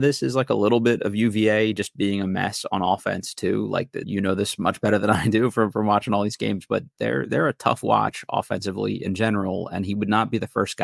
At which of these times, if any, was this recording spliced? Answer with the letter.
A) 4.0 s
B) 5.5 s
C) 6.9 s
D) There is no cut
A